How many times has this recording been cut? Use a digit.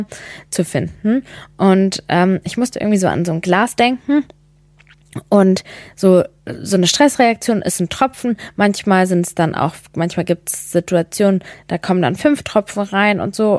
0